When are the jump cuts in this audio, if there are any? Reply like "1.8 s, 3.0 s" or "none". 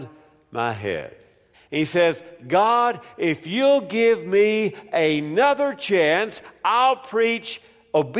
1.5 s